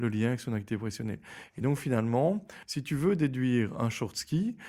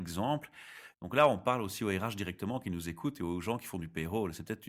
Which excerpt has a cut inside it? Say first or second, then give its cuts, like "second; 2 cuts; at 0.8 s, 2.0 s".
second; 1 cut; at 0.9 s